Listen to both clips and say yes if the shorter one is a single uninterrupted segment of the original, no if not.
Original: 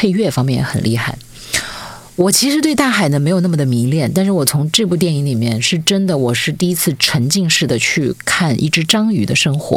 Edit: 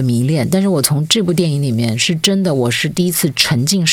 yes